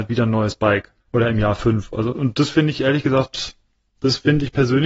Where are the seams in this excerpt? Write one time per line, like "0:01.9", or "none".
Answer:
0:01.0
0:02.1